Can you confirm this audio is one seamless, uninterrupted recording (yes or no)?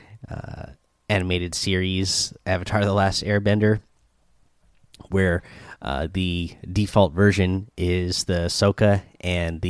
yes